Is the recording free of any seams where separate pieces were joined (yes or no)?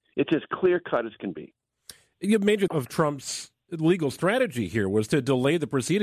no